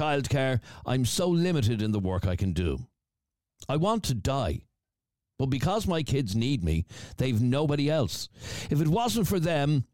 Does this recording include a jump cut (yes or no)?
no